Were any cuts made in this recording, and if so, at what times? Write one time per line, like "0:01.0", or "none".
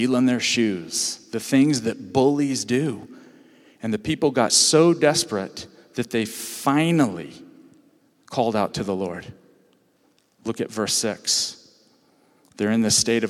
none

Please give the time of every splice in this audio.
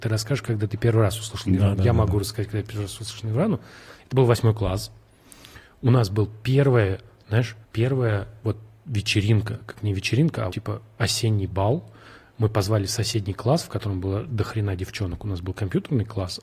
0:07.6
0:10.5

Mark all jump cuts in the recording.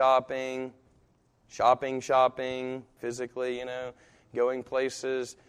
0:03.0

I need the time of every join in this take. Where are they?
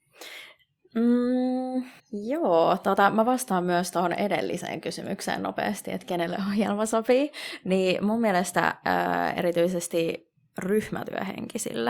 0:02.0

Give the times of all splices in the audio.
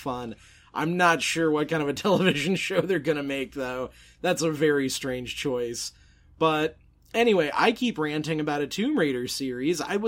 none

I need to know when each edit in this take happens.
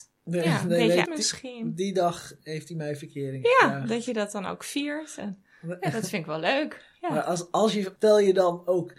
0:01.1
0:08.0

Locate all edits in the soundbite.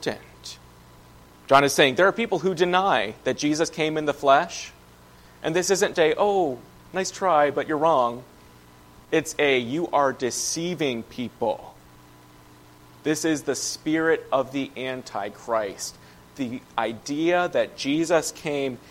0:01.2
0:05.9

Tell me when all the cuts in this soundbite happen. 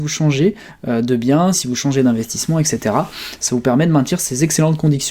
0:01.5

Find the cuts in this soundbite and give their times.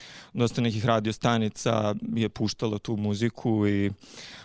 none

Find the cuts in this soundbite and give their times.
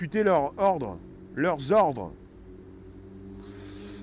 none

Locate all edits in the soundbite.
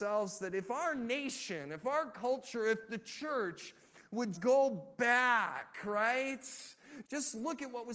0:04.3
0:07.0

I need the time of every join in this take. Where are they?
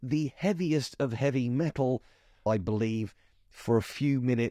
0:02.5

